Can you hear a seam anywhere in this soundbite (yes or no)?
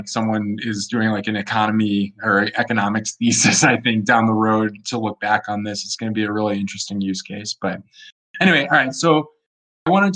no